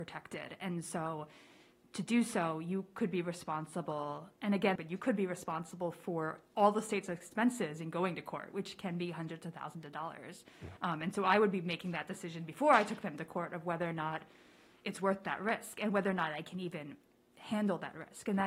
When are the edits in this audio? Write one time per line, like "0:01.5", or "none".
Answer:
0:04.8